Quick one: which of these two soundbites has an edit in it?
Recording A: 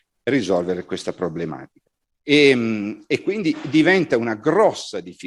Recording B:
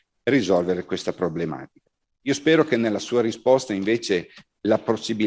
A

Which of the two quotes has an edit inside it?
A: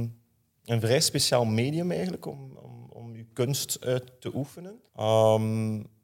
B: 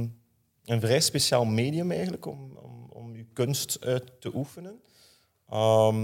A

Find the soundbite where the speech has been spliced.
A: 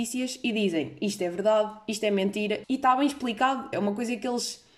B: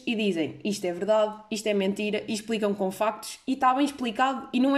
A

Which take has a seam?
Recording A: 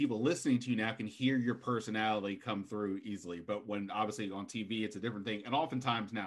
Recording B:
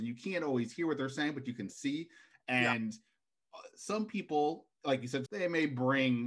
B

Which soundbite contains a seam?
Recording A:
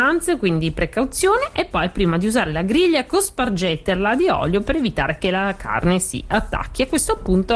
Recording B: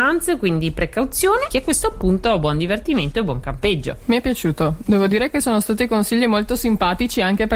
B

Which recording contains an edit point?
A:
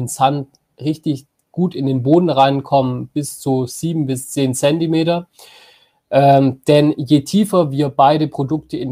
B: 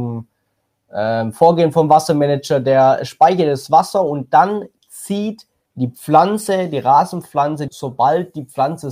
B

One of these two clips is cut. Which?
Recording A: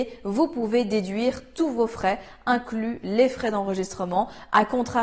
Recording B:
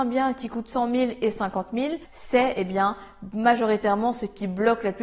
B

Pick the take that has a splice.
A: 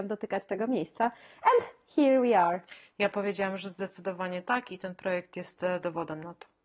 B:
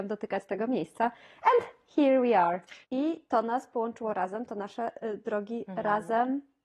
B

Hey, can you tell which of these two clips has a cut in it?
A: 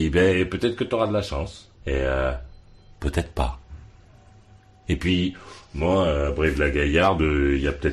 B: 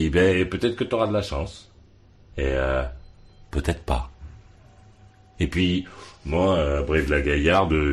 A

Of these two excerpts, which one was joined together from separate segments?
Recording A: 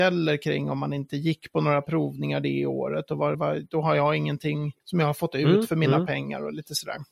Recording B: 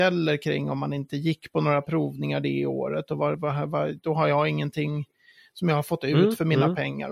A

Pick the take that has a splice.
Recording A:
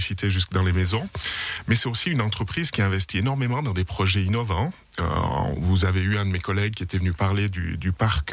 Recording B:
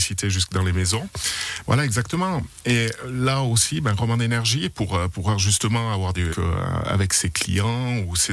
B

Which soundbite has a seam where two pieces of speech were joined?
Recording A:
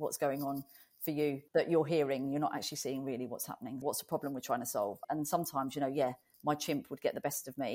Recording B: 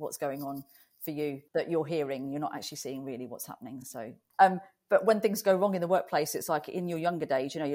A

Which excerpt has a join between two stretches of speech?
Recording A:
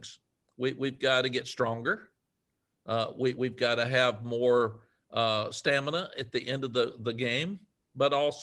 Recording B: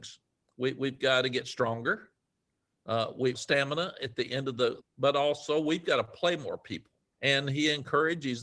B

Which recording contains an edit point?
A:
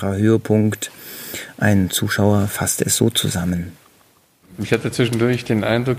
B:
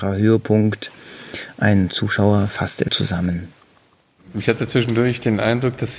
B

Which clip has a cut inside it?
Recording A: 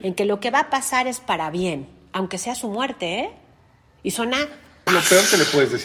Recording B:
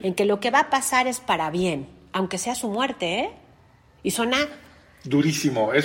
A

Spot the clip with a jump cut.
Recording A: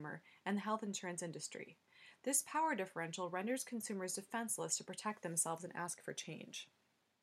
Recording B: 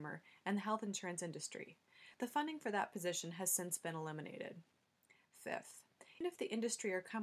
B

